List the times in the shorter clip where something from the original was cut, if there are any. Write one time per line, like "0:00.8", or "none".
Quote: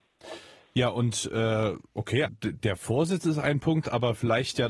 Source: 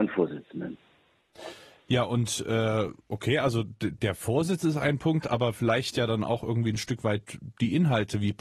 0:02.2